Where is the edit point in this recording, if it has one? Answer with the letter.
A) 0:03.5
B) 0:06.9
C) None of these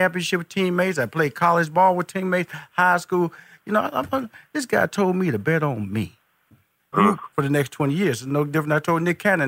B